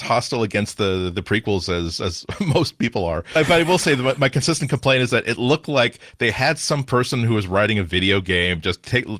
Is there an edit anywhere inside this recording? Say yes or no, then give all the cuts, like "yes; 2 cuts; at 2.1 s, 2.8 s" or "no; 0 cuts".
yes; 1 cut; at 3.4 s